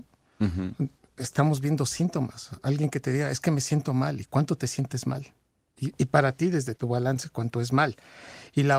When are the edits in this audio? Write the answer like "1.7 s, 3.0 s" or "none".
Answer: 6.8 s